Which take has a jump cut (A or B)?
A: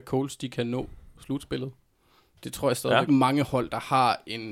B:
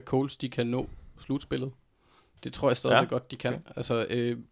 A